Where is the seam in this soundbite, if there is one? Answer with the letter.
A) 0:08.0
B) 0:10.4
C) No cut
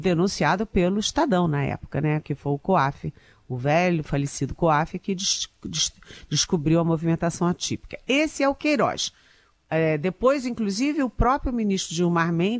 C